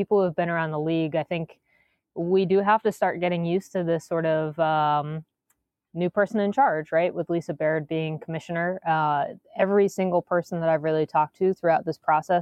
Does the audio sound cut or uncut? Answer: uncut